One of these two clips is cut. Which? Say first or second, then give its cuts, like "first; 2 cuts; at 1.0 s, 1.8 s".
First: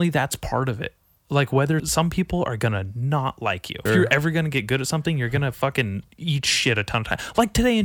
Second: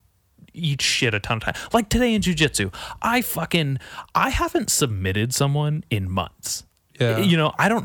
first; 3 cuts; at 1.8 s, 3.9 s, 6.1 s